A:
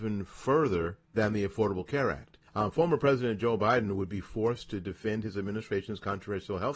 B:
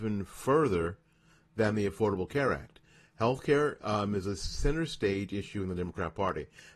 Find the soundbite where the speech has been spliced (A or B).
A